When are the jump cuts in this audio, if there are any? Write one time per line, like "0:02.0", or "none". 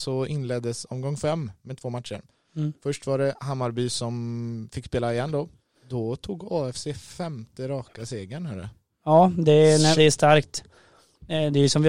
0:05.7
0:10.0